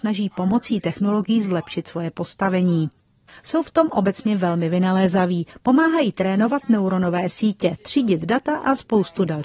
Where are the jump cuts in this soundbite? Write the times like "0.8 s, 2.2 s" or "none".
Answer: none